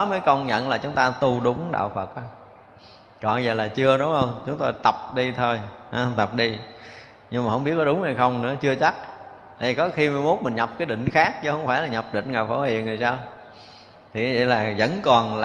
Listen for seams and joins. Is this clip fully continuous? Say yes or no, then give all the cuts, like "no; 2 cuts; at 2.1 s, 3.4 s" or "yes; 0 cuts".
yes; 0 cuts